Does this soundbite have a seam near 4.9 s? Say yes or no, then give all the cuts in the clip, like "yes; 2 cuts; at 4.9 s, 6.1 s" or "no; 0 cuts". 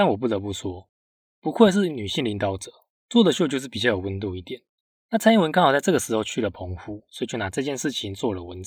yes; 1 cut; at 4.9 s